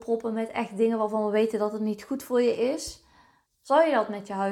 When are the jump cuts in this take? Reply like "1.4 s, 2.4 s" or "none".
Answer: 3.5 s